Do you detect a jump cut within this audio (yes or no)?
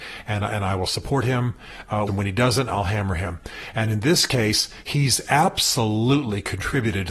yes